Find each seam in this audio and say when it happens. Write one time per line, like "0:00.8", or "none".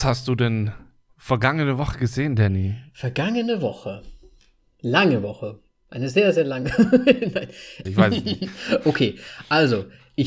0:07.9